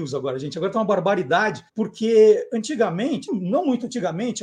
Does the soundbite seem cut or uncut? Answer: cut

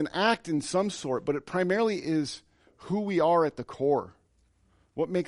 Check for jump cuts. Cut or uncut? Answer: uncut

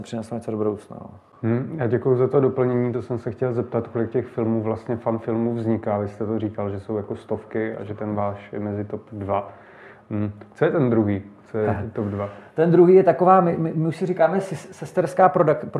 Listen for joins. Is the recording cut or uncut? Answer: uncut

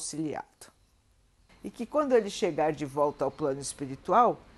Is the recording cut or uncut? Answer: cut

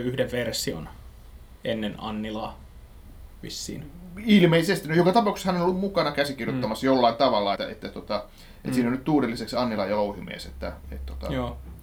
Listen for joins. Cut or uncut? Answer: cut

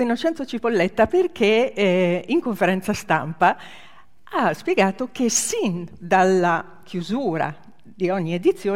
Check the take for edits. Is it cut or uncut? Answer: uncut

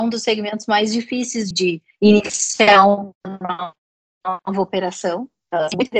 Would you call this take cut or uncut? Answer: cut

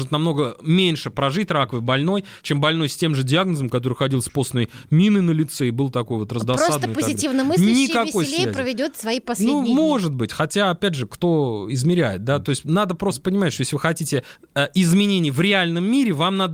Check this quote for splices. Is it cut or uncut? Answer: uncut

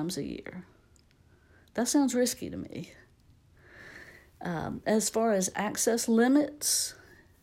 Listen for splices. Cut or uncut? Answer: uncut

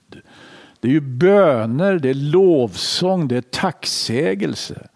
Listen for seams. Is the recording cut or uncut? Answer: uncut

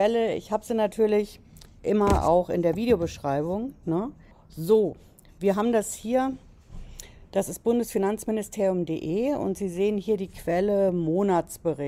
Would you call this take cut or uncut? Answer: cut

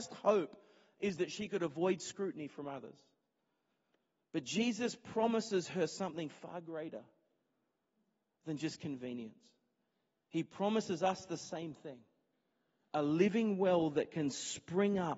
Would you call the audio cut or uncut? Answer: uncut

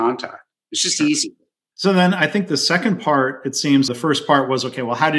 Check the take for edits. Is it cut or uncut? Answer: cut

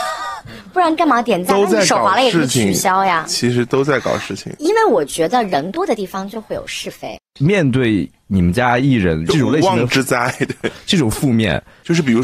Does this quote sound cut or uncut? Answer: cut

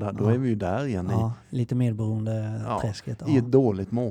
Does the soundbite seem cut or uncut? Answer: uncut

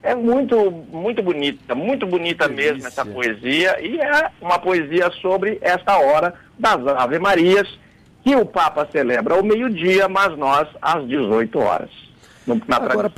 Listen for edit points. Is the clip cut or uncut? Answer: uncut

